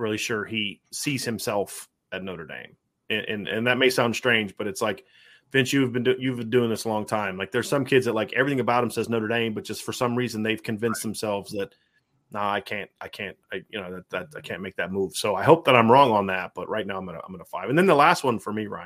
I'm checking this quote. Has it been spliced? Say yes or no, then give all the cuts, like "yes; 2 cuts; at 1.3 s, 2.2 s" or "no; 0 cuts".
no; 0 cuts